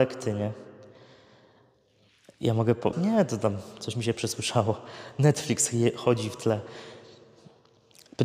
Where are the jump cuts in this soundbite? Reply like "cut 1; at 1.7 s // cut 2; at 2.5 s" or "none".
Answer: cut 1; at 2.9 s